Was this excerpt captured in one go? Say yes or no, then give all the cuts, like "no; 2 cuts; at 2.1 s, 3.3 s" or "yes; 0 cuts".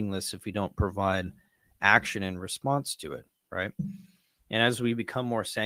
yes; 0 cuts